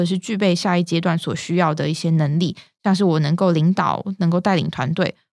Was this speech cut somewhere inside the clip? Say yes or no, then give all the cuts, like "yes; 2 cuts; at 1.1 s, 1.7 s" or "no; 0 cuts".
no; 0 cuts